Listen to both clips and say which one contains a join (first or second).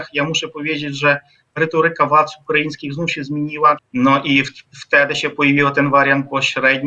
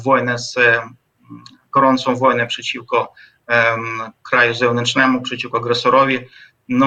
first